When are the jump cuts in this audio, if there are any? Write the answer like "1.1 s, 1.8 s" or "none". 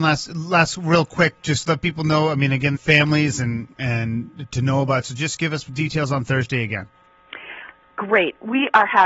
2.8 s, 4.5 s